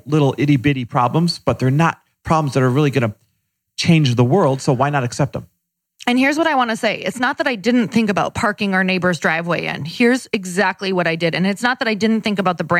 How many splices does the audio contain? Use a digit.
0